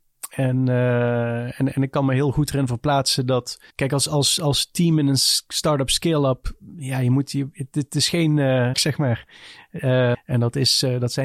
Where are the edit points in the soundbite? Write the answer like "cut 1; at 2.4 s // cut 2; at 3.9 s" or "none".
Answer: cut 1; at 3.7 s // cut 2; at 8.7 s // cut 3; at 10.1 s